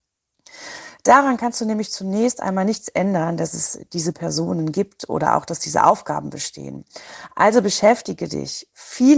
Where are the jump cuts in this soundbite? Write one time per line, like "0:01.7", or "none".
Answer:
none